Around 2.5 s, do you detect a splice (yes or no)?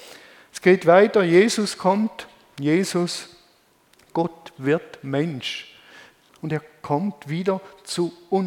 no